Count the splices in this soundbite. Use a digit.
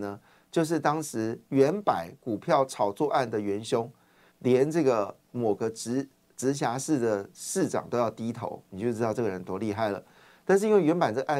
1